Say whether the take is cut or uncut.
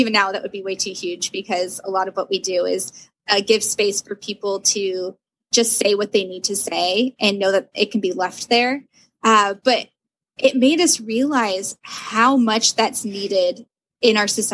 uncut